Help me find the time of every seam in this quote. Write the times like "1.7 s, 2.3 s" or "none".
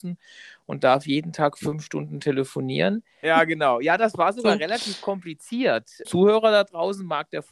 3.2 s, 6.0 s